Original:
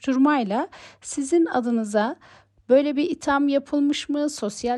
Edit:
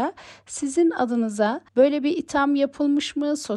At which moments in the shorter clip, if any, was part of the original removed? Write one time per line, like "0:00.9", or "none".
0:01.7